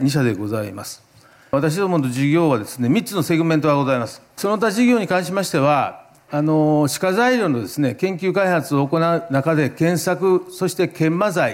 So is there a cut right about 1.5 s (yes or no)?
no